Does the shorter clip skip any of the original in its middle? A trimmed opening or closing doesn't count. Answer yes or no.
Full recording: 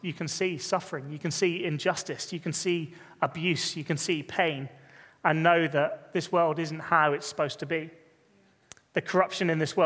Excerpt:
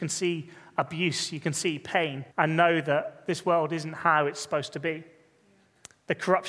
yes